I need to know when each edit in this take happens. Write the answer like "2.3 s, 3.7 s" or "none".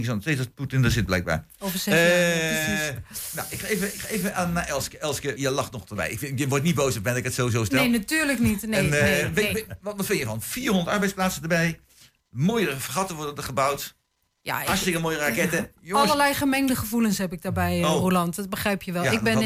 5.4 s